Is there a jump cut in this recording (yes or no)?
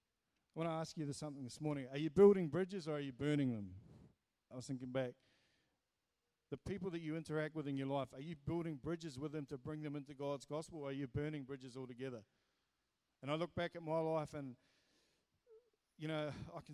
yes